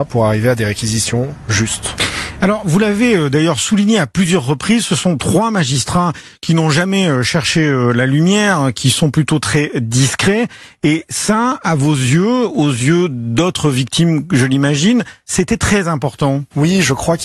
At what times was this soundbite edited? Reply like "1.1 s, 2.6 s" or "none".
none